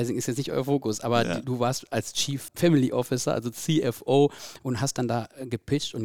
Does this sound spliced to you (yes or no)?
yes